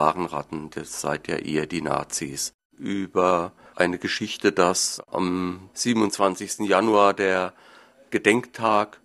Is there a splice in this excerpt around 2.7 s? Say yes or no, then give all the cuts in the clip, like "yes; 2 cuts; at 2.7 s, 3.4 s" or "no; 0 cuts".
yes; 1 cut; at 2.7 s